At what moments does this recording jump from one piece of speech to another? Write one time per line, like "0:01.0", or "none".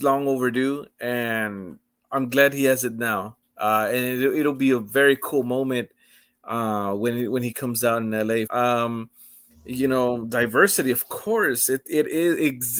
0:08.5